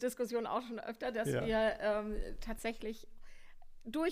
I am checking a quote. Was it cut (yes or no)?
no